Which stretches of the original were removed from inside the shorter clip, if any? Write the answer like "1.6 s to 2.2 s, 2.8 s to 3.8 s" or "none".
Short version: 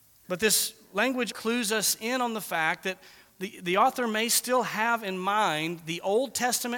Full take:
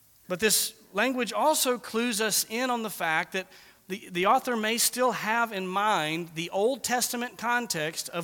1.3 s to 1.8 s